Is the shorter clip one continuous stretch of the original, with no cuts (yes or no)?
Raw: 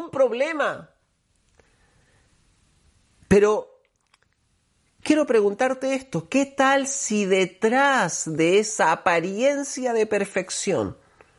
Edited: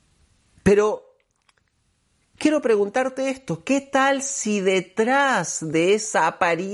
yes